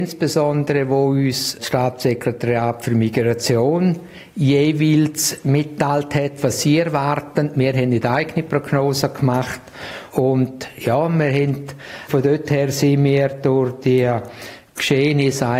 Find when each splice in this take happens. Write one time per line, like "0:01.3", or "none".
0:10.1
0:12.1